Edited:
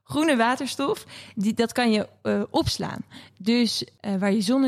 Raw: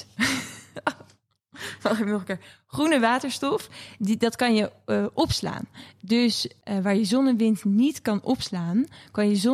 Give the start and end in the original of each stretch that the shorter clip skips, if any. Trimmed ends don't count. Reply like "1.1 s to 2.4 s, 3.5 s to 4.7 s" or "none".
none